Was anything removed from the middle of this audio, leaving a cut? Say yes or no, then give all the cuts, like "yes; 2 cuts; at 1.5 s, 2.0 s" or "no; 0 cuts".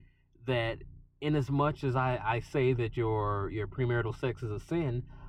no; 0 cuts